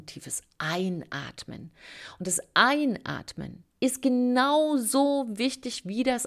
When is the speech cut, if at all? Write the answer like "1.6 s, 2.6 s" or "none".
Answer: 3.7 s